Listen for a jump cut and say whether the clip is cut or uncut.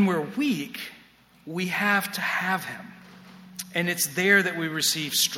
uncut